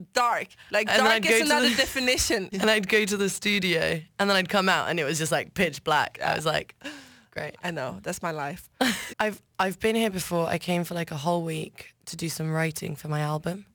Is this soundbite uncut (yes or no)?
no